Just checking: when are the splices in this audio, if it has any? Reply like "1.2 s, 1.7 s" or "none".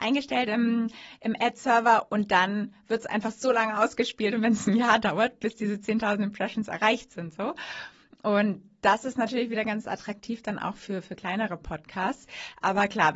none